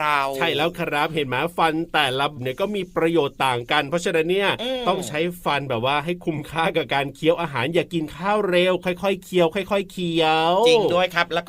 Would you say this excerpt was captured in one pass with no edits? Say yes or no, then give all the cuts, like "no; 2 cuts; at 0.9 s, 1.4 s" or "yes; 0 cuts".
no; 1 cut; at 2.4 s